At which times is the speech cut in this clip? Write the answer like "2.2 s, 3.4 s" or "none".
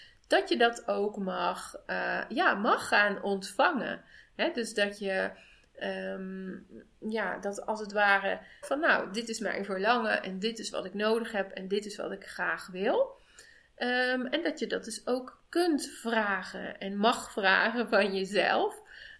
8.6 s